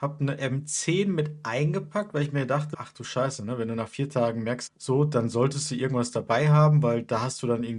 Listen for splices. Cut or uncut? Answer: cut